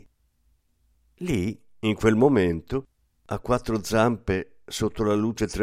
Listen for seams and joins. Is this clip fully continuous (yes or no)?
yes